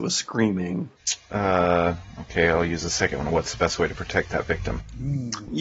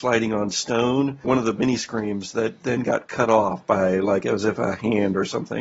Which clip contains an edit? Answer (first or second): second